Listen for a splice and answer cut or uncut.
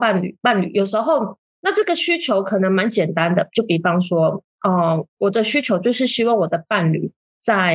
cut